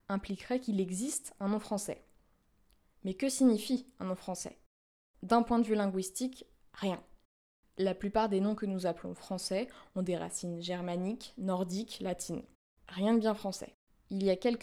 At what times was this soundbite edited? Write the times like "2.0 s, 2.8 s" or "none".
none

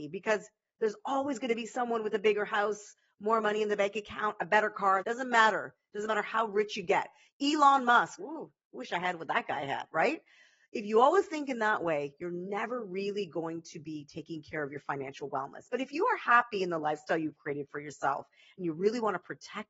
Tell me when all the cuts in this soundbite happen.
5.0 s, 8.2 s

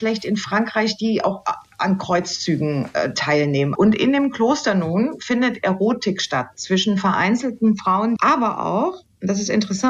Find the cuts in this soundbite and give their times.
3.8 s, 8.2 s

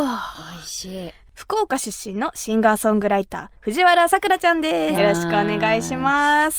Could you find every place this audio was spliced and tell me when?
1.3 s, 4.9 s

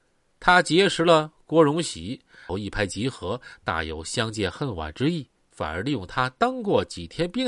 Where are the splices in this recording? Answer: 2.5 s, 5.5 s

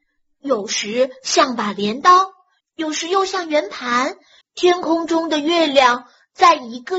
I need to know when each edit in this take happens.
2.6 s, 4.4 s

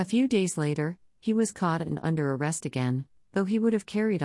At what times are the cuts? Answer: none

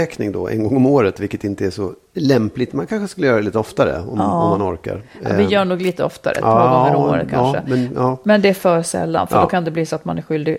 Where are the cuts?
none

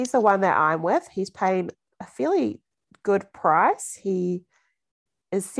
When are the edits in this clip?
none

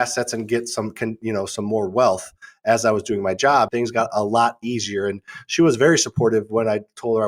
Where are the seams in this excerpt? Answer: 3.7 s

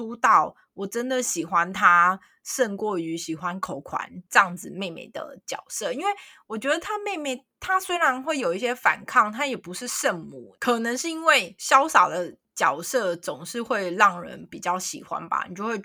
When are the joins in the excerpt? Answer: none

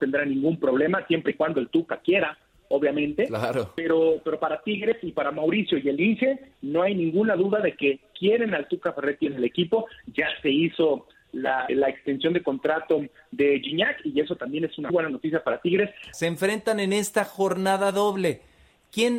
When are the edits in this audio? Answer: 11.7 s, 14.9 s, 16.1 s

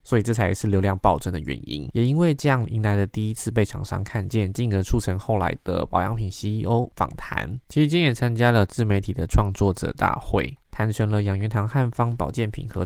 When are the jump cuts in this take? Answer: none

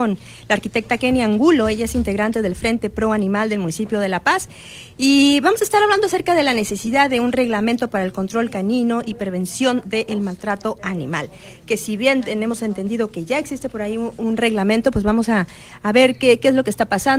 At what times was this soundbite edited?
none

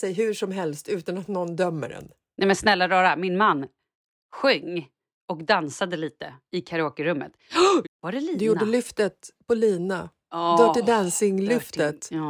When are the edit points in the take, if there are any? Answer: 7.8 s

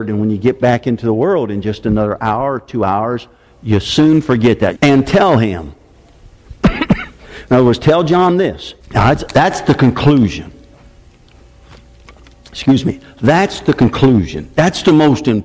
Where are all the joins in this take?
4.8 s, 8.8 s

